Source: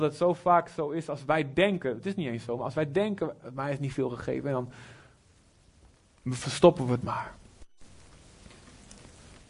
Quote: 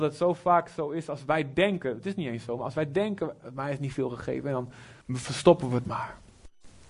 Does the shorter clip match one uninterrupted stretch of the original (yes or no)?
no